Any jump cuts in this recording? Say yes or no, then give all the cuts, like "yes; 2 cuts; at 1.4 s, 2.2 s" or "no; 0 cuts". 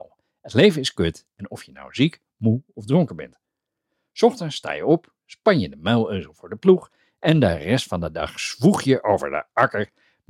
no; 0 cuts